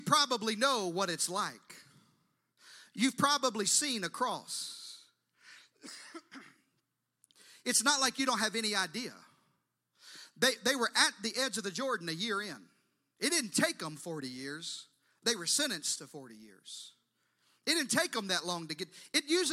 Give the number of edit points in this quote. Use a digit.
0